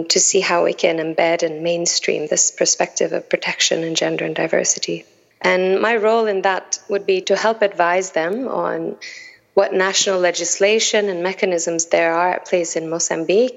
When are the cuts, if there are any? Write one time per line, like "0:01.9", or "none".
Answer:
0:05.3
0:07.2